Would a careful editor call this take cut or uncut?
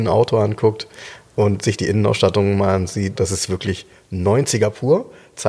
cut